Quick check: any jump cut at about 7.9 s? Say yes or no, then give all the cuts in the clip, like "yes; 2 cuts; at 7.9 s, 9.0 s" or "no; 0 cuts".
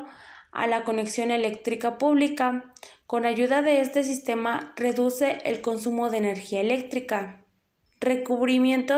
yes; 1 cut; at 7.9 s